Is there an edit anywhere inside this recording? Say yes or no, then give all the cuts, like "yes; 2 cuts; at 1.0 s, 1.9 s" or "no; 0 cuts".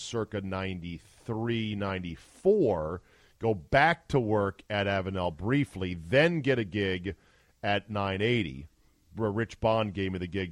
no; 0 cuts